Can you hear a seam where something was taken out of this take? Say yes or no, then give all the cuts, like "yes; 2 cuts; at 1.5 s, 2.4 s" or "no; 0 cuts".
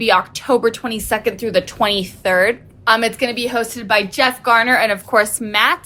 no; 0 cuts